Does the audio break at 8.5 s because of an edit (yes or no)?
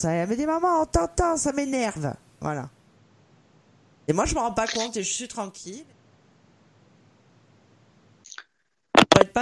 no